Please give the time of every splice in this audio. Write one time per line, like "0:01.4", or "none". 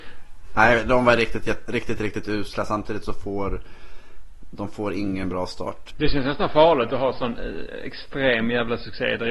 0:05.9